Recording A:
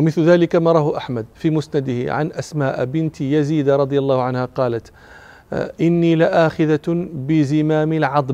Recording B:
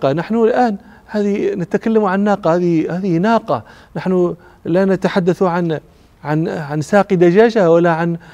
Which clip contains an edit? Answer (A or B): A